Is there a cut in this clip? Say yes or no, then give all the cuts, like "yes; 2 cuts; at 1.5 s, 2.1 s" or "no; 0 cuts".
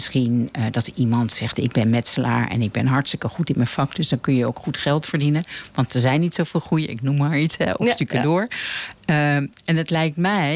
no; 0 cuts